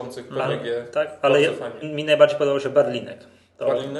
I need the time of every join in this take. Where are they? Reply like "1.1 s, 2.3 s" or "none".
1.8 s